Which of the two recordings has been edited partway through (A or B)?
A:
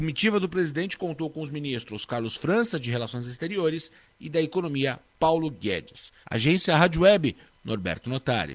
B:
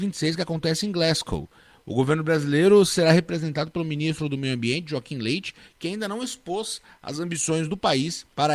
A